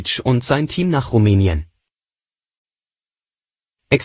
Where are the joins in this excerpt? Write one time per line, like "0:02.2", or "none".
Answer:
none